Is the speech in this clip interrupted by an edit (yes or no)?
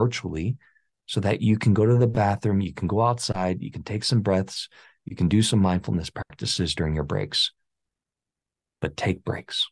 no